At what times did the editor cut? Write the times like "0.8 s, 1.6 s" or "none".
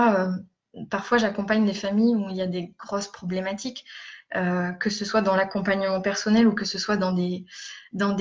none